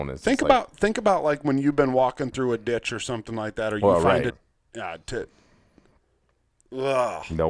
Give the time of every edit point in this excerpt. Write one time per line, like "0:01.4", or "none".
0:04.3